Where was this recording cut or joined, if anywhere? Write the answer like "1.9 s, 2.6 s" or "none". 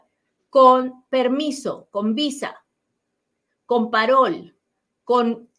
none